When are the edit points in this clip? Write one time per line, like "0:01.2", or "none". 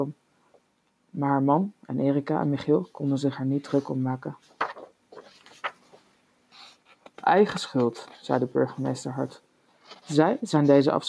none